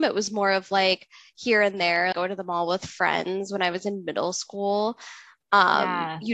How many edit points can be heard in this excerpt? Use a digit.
1